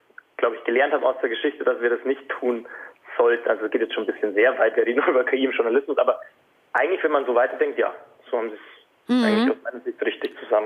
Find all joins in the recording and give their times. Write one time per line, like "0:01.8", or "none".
none

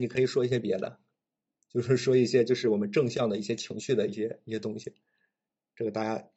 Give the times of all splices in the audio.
none

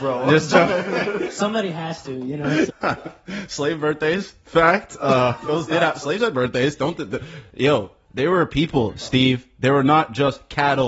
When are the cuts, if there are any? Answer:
0:02.7

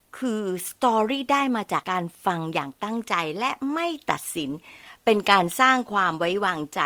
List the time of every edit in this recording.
0:01.8

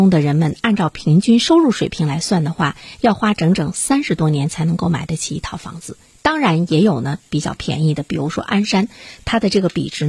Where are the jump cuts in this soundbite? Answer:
none

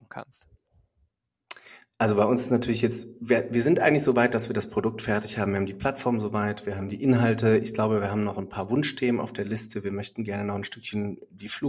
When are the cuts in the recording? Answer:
none

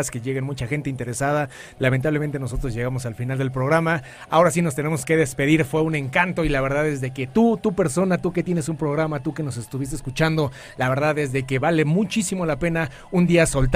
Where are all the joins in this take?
0:01.8

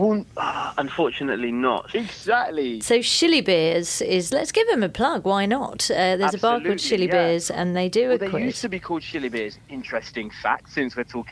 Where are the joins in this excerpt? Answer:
0:01.9

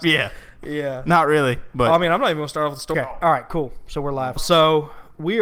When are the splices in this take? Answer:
0:02.9
0:04.4

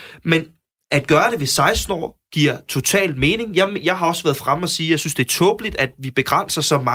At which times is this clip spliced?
none

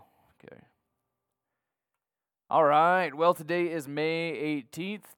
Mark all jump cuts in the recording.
none

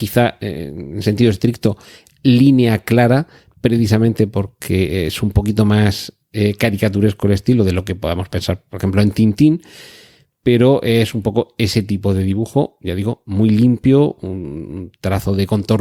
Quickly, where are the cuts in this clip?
none

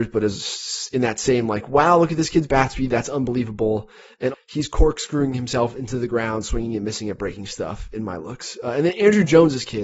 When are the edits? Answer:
0:04.3

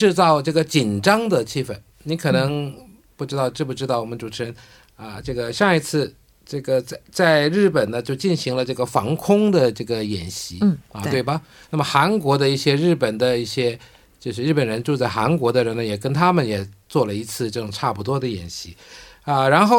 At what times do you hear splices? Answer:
none

